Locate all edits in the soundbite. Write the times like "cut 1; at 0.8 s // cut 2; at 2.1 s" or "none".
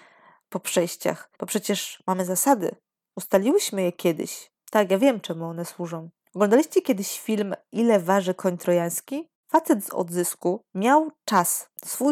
cut 1; at 1.4 s // cut 2; at 6.2 s // cut 3; at 9.4 s